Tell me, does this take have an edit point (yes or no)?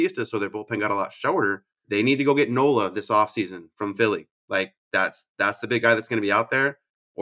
yes